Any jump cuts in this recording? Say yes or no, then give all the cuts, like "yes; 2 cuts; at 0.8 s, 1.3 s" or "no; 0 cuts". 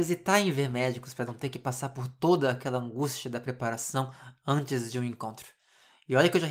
no; 0 cuts